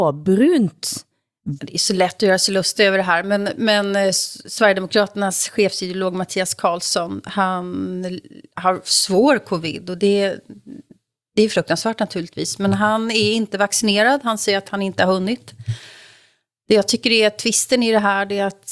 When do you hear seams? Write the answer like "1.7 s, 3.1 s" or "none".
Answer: 1.6 s

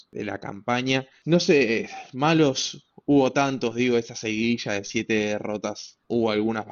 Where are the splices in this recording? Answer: none

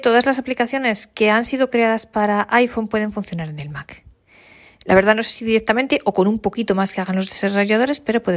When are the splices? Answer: none

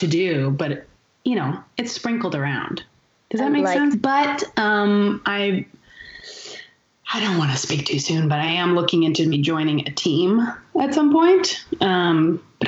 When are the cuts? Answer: 3.9 s, 9.3 s

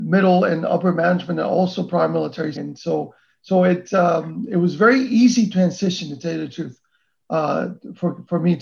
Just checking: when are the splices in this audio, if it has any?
2.6 s

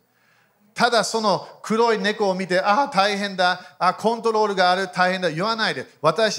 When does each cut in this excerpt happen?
3.8 s

